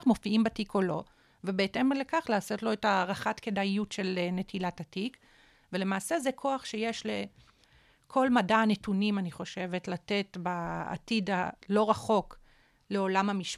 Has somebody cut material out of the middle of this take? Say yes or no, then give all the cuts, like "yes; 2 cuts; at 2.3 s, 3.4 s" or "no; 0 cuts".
no; 0 cuts